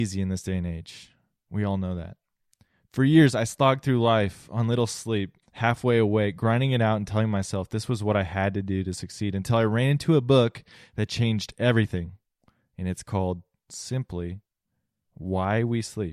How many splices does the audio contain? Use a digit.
1